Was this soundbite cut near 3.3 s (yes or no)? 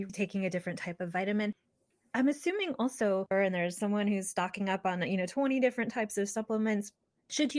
yes